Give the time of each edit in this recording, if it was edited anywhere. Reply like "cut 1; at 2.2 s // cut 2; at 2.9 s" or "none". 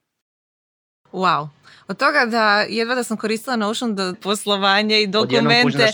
cut 1; at 4.1 s